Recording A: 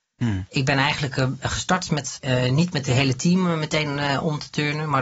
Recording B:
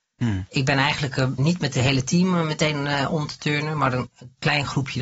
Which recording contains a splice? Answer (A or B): B